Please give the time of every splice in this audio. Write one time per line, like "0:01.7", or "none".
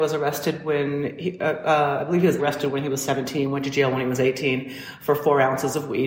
0:02.4